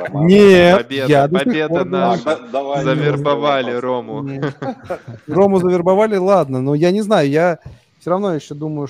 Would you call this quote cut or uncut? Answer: uncut